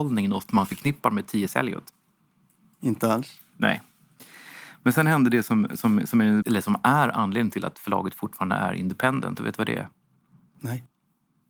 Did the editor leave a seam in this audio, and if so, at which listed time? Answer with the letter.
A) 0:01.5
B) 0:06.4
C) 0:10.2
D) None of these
B